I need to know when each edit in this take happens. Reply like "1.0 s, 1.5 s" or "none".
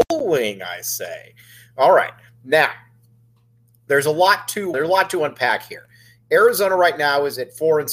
4.7 s